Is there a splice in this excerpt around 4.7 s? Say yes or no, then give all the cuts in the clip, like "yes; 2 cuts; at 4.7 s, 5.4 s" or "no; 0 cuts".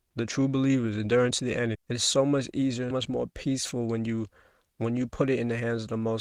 no; 2 cuts; at 1.7 s, 2.9 s